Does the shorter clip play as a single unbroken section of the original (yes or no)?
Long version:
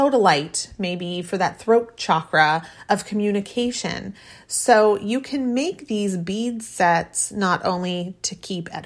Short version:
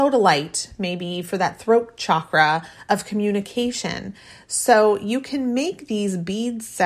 yes